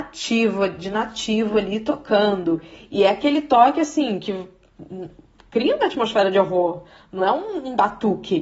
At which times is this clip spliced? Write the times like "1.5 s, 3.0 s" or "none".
none

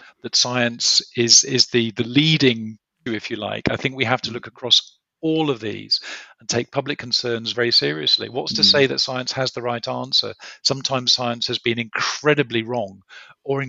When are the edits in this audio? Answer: 3.1 s, 7.5 s

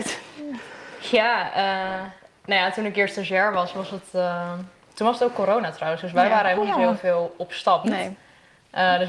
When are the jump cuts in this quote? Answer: 7.8 s

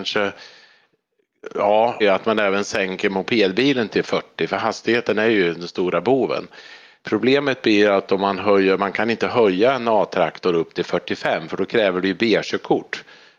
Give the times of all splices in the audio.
2.0 s

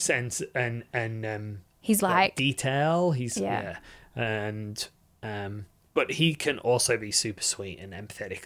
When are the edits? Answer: 2.0 s

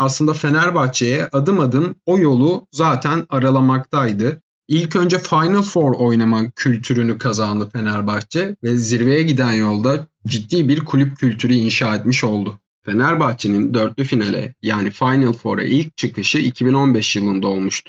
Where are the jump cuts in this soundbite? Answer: none

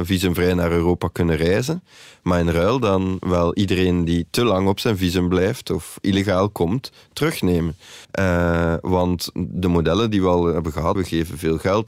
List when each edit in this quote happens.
8.0 s, 11.0 s

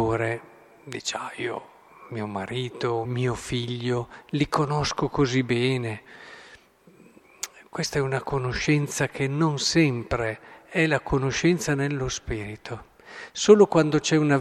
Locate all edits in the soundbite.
3.0 s

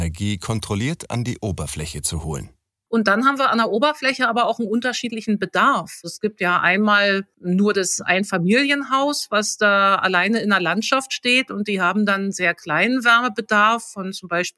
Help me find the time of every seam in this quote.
2.9 s

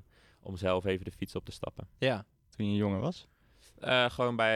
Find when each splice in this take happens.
2.5 s

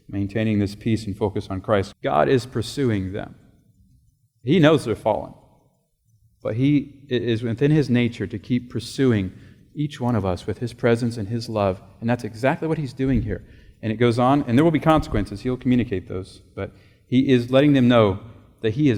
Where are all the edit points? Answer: 1.9 s

